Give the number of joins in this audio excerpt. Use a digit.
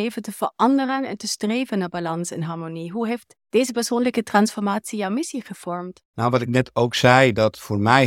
1